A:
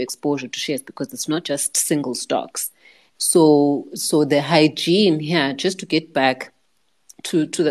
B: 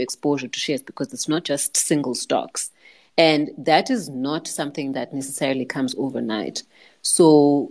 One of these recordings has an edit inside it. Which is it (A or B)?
A